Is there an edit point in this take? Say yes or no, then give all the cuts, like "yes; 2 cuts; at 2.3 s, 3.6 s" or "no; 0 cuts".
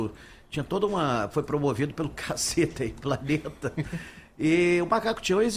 no; 0 cuts